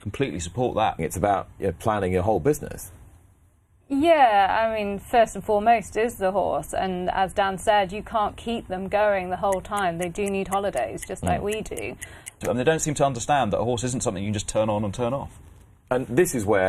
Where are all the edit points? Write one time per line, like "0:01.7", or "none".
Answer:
0:01.0
0:12.4